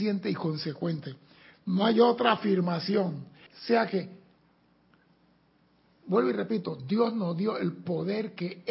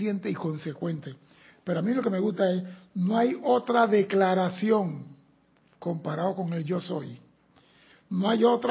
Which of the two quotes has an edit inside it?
first; 2 cuts; at 1.5 s, 3.5 s

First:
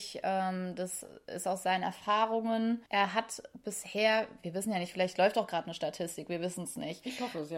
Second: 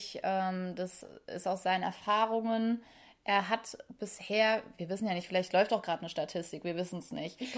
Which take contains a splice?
first; 1 cut; at 2.9 s

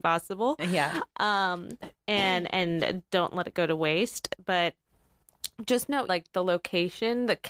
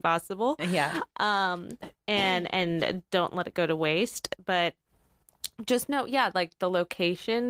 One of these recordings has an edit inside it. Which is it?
first; 1 cut; at 6.1 s

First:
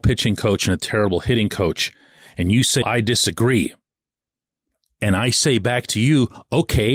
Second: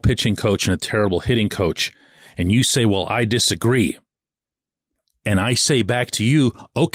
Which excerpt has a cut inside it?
first; 1 cut; at 2.8 s

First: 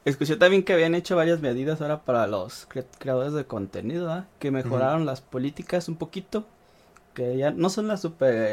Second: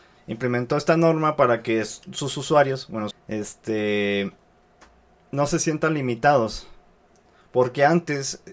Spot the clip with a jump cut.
second; 1 cut; at 3.1 s

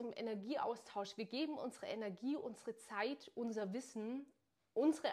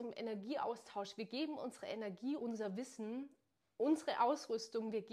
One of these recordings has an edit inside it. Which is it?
second; 1 cut; at 2.4 s

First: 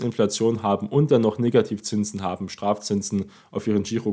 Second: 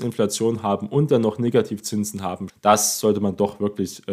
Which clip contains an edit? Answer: second; 1 cut; at 2.5 s

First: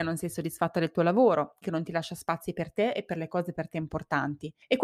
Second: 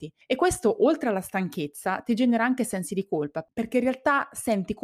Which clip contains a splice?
first; 1 cut; at 1.6 s

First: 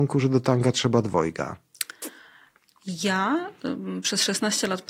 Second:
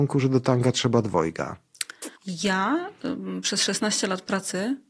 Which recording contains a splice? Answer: second; 1 cut; at 2.2 s

